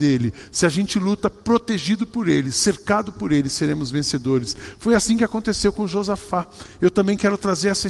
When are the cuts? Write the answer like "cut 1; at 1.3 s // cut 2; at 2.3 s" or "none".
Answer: none